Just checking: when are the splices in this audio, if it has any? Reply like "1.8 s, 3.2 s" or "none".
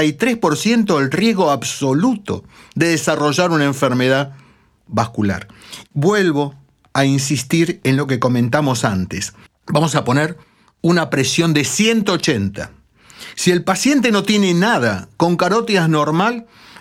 5.9 s, 9.5 s

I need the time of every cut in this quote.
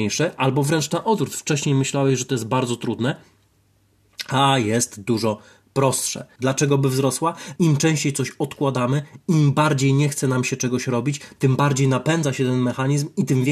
6.4 s, 7.6 s

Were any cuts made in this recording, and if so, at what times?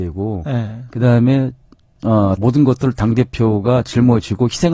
2.4 s

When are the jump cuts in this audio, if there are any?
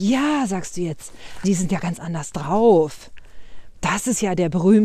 1.4 s

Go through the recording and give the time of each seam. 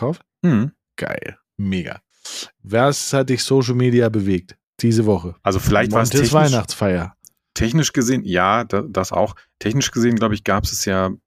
2.6 s, 5.4 s

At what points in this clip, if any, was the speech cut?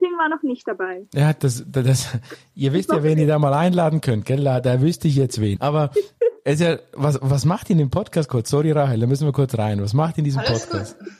5.6 s

